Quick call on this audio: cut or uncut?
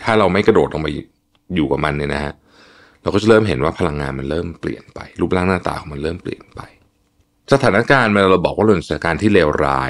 uncut